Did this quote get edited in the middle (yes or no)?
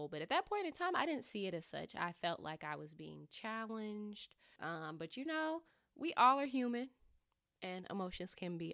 yes